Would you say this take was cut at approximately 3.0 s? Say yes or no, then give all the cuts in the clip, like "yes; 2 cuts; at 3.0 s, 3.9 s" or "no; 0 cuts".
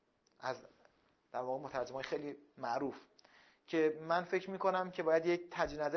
no; 0 cuts